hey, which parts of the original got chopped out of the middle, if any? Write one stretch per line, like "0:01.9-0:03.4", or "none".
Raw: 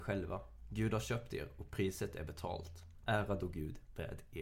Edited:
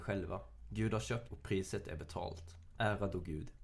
0:01.3-0:01.6